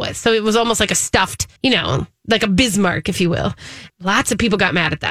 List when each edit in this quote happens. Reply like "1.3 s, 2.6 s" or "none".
1.6 s, 3.9 s

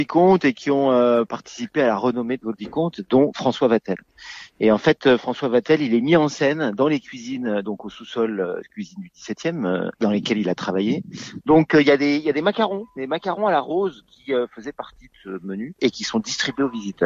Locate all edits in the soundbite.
11.4 s

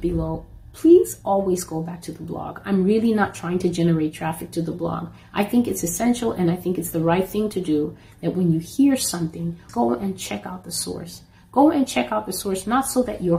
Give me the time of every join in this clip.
9.7 s

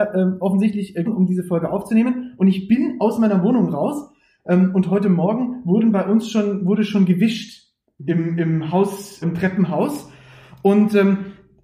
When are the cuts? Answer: 1.1 s, 9.2 s

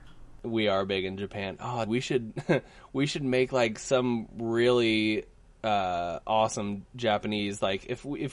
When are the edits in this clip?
1.9 s

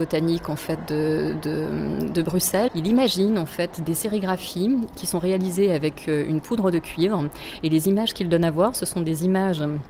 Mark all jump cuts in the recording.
2.7 s, 3.9 s

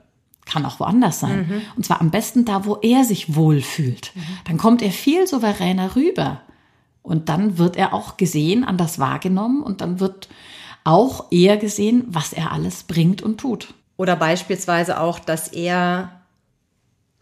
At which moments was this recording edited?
none

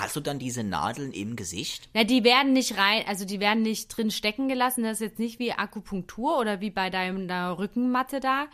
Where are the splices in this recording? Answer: none

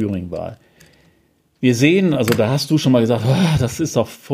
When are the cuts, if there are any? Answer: none

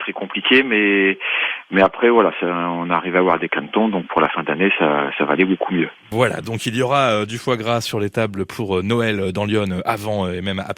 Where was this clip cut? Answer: none

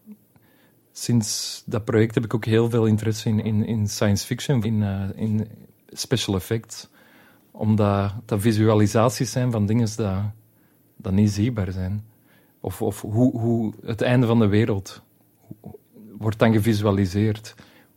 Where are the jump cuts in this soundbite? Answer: 4.6 s

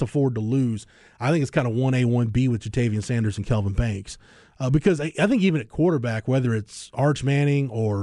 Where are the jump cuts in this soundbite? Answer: none

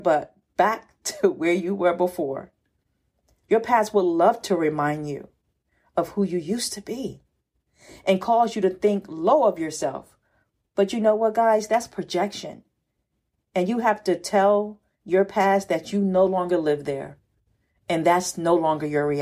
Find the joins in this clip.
3.4 s

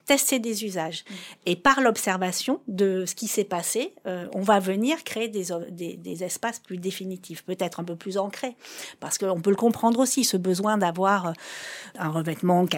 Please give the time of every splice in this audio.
none

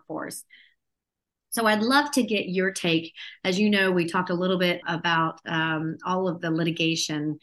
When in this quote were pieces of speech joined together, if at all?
4.8 s

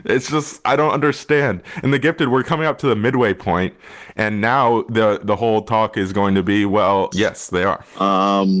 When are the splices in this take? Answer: 7.1 s

